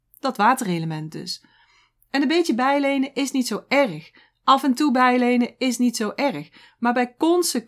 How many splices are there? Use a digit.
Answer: 0